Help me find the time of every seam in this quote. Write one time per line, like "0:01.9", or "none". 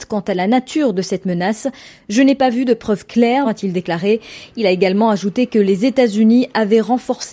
0:03.4